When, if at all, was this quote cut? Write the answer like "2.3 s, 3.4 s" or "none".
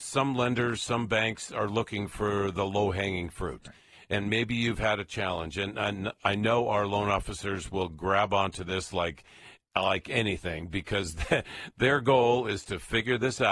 none

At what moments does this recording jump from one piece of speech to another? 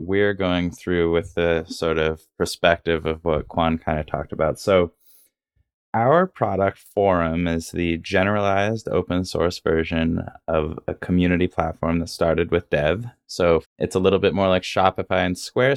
13.6 s

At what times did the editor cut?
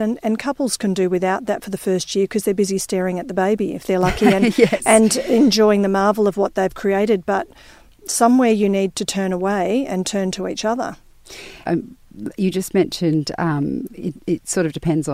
11.6 s

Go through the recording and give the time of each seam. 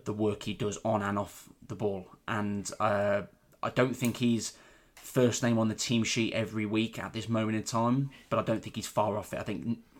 none

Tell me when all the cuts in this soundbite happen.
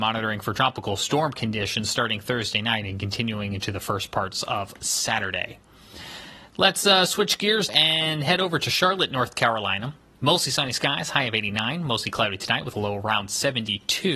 7.7 s

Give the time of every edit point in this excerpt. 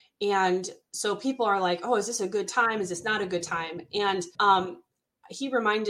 4.3 s

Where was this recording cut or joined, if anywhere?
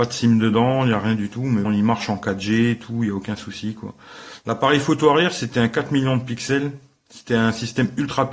1.7 s

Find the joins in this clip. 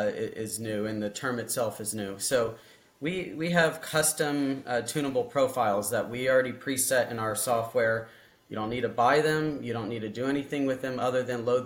none

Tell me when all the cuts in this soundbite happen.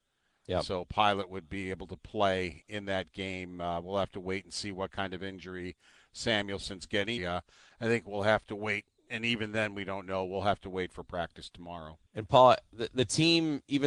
7.2 s, 12.1 s

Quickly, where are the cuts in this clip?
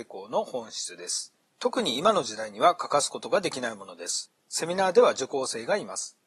4.4 s

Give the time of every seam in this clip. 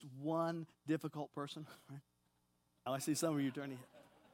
2.9 s

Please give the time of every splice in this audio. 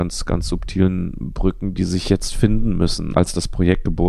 3.1 s

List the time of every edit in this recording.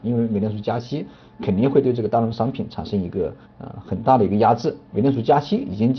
3.4 s, 4.9 s

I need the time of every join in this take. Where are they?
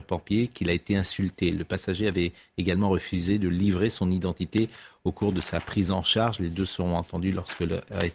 none

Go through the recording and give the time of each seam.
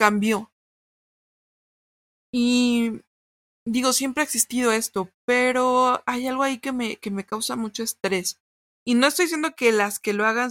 8.7 s

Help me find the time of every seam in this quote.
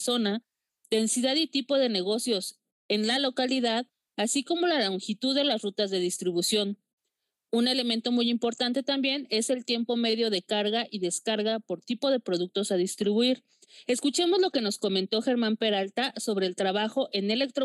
13.8 s

